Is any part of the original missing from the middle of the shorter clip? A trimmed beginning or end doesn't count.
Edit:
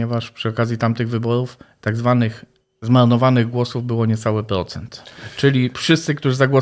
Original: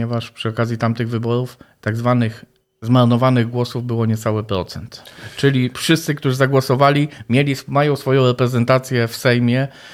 no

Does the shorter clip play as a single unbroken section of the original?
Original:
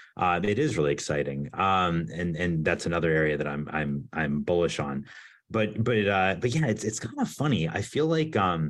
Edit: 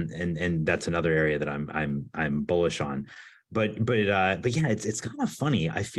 yes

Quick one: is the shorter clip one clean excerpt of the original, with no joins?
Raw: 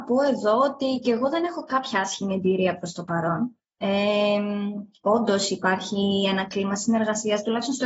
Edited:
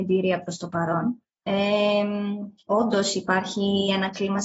yes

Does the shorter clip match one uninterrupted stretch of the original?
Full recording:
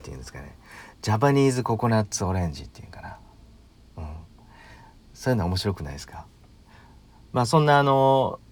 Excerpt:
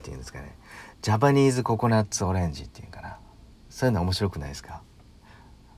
no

